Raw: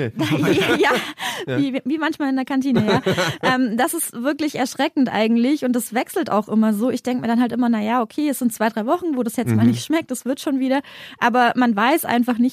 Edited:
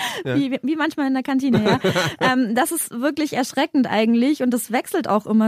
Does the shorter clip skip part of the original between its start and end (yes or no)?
no